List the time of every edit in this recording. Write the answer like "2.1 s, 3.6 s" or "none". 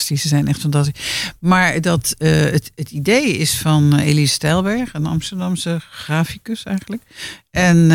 none